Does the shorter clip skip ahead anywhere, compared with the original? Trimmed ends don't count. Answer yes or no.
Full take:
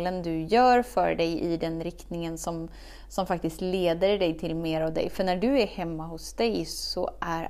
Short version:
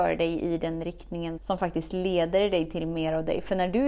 yes